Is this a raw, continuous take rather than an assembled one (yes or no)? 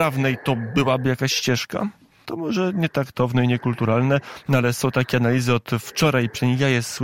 no